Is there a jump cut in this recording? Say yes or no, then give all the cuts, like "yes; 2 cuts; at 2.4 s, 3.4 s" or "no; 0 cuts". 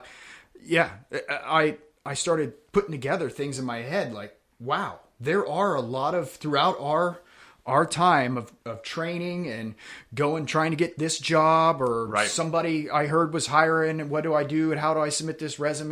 no; 0 cuts